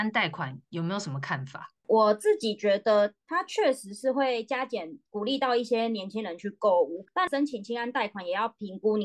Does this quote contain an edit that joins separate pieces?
no; 0 cuts

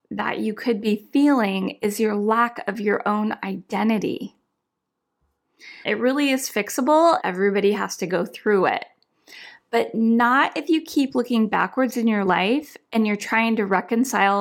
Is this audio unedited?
no; 2 cuts; at 5.8 s, 7.2 s

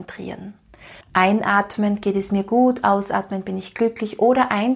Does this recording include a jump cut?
yes; 1 cut; at 1.0 s

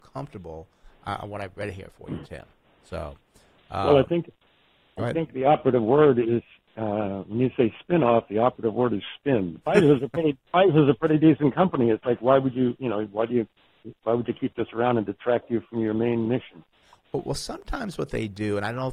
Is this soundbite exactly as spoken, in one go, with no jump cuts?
no; 1 cut; at 9.6 s

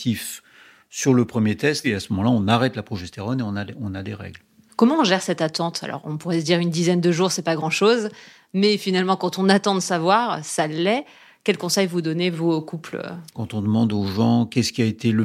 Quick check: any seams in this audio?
yes; 1 cut; at 1.8 s

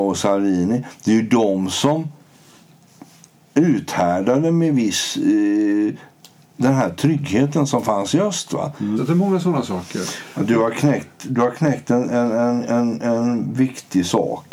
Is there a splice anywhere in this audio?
yes; 1 cut; at 9.0 s

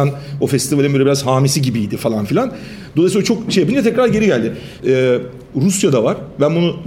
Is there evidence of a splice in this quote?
yes; 1 cut; at 4.8 s

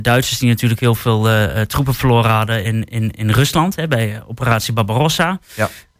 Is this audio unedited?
yes; 0 cuts

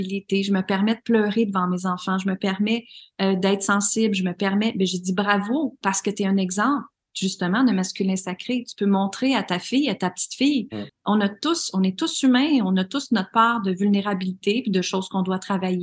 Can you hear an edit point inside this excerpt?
yes; 1 cut; at 10.9 s

